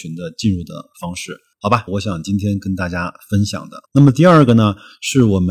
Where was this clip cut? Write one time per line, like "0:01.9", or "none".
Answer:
0:01.9